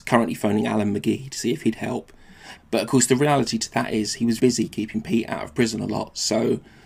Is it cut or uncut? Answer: cut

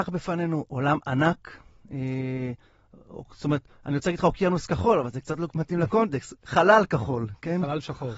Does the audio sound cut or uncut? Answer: uncut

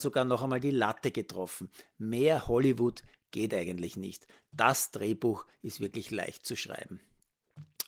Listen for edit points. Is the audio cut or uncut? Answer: uncut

